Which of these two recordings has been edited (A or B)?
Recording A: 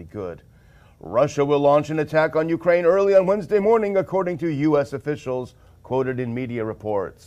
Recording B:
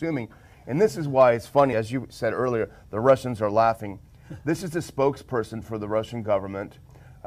B